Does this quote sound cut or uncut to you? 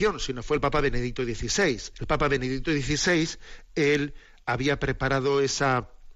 cut